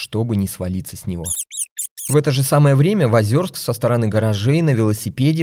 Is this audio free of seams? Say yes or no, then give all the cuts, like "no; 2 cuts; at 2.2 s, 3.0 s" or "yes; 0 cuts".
yes; 0 cuts